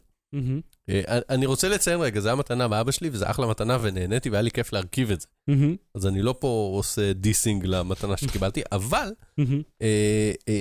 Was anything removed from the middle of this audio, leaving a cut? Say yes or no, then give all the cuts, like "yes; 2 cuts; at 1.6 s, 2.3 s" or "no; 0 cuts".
no; 0 cuts